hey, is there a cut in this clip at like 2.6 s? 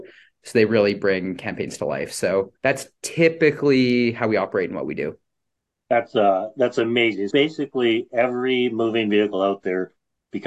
yes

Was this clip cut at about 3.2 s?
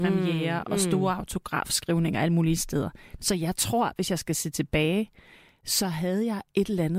yes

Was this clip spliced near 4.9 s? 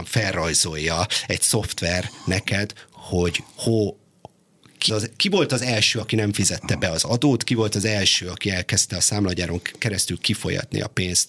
yes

